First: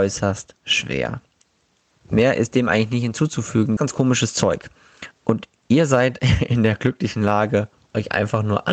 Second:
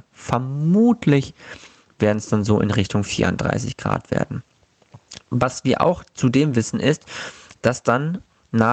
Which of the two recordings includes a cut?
first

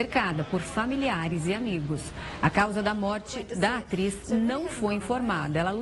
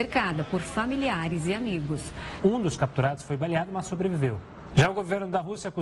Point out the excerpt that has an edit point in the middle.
second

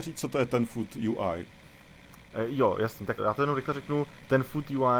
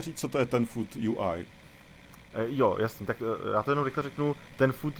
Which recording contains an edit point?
first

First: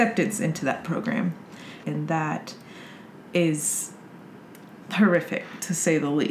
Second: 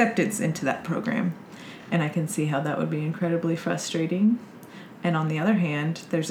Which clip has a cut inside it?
first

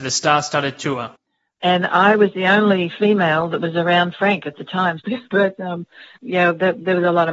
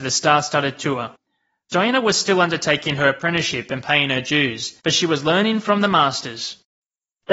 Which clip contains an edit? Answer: first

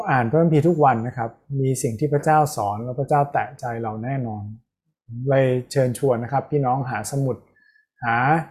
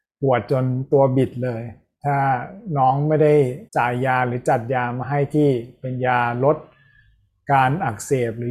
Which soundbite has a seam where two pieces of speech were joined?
second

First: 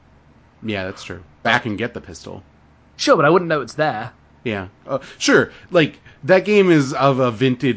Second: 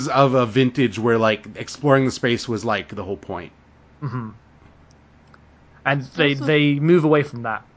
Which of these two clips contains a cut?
first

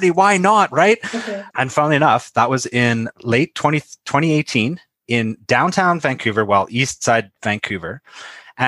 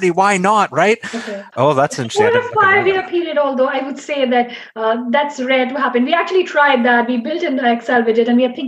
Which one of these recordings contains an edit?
second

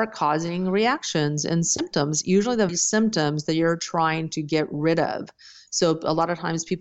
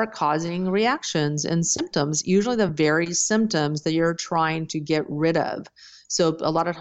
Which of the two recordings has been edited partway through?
first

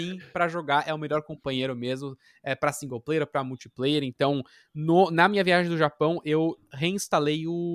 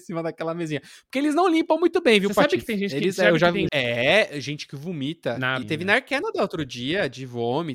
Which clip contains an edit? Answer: second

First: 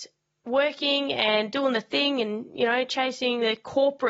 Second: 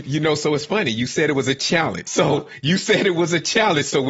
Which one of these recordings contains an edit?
second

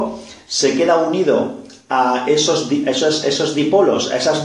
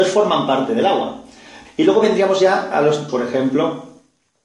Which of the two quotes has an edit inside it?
second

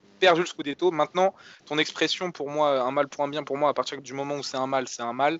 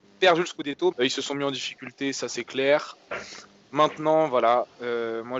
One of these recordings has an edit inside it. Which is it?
second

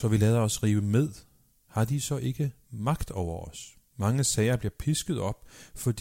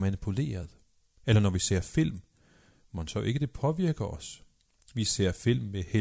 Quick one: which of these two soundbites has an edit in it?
first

